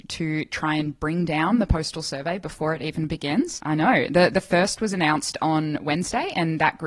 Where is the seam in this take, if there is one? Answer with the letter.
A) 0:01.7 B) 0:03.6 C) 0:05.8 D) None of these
B